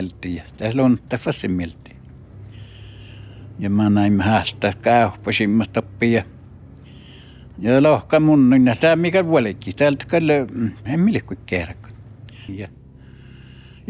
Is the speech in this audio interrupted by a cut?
yes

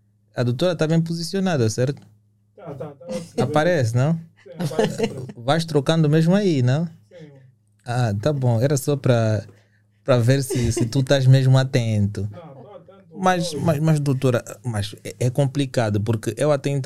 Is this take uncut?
yes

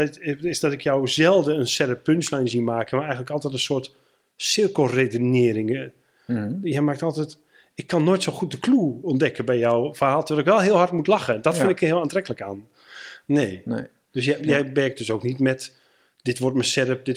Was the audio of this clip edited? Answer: yes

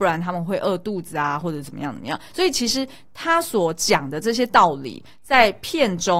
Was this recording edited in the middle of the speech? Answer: no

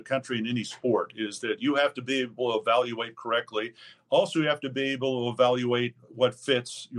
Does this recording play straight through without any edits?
yes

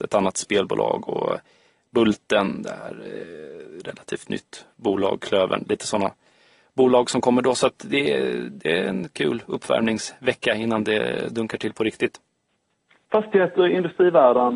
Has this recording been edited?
no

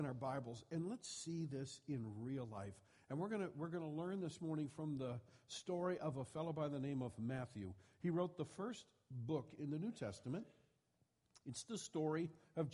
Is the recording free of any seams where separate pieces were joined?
yes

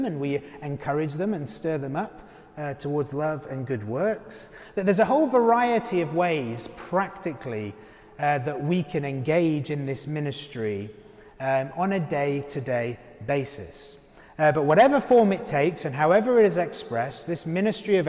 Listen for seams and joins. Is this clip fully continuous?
yes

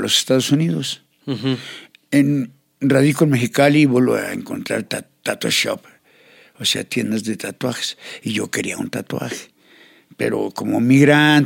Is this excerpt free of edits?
yes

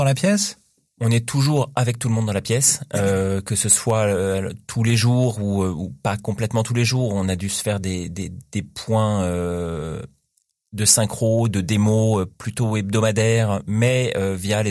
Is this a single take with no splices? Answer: yes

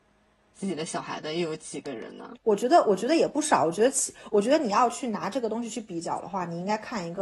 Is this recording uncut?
no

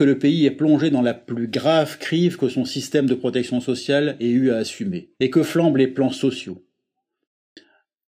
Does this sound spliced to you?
yes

